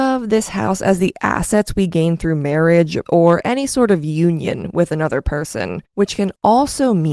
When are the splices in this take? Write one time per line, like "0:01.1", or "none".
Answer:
0:03.0
0:05.9

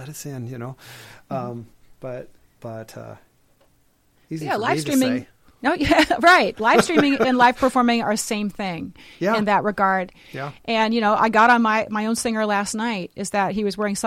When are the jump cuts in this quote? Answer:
none

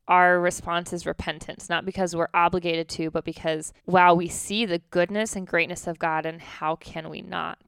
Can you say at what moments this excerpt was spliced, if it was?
0:03.8

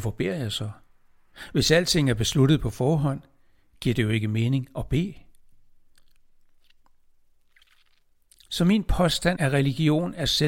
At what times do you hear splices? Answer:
0:09.4

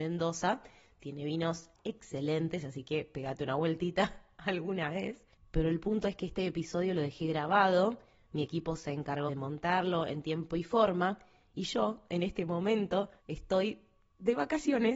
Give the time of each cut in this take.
0:09.3
0:13.2

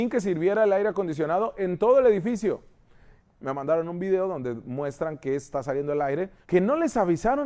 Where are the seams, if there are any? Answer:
0:03.2
0:06.4

